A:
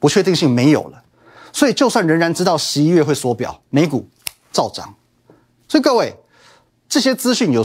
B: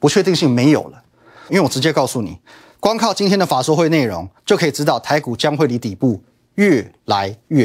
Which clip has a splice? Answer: B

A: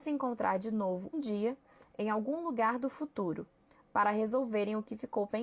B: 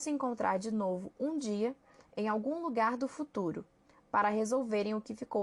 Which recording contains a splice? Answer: A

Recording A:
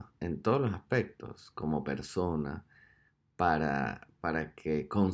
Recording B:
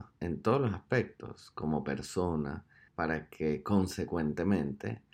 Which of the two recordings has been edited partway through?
B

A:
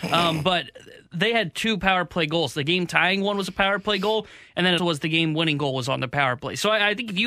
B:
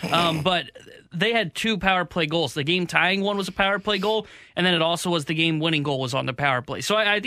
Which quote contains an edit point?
A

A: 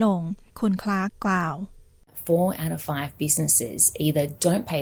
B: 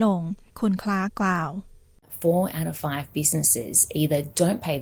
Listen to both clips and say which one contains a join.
B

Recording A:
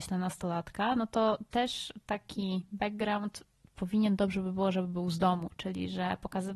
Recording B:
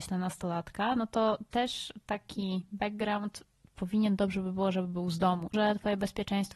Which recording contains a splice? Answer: B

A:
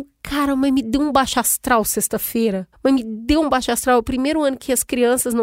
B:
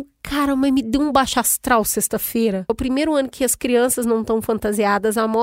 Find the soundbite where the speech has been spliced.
B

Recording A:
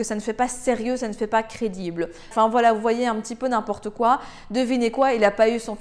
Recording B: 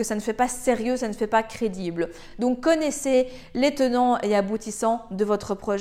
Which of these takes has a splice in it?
A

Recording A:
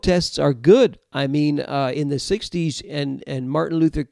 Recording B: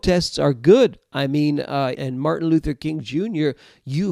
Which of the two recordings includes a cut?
B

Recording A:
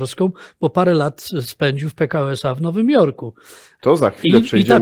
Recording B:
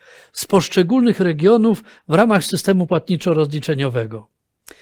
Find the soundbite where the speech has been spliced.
A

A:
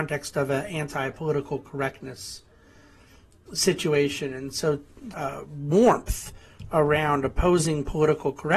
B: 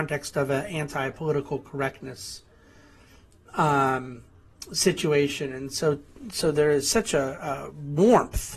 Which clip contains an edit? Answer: A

